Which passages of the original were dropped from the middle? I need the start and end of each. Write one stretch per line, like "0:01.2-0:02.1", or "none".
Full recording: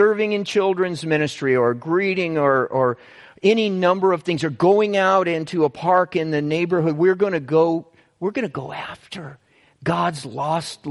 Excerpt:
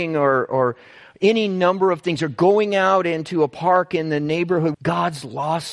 0:07.0-0:09.8